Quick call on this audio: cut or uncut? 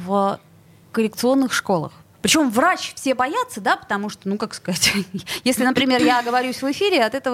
cut